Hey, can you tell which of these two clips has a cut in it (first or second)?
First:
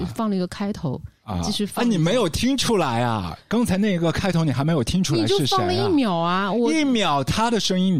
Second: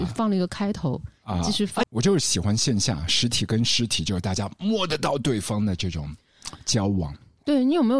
second